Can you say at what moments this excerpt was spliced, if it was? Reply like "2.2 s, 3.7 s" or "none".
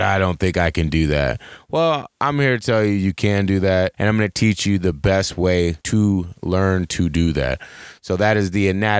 3.9 s, 5.8 s